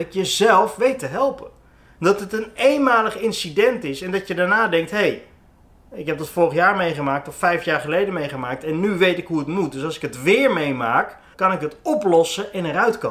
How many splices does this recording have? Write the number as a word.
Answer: one